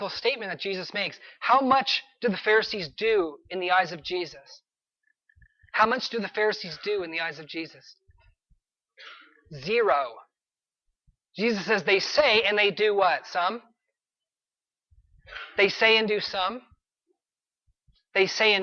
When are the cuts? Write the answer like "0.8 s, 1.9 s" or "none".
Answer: none